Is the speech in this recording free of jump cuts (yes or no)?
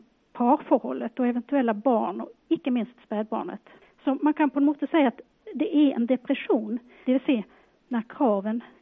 no